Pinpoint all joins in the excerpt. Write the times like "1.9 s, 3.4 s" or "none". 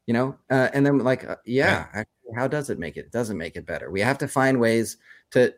none